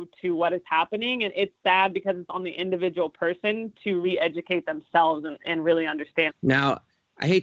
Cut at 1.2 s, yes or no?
no